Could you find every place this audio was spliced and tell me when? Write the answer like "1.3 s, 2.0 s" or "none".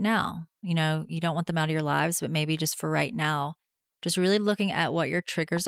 none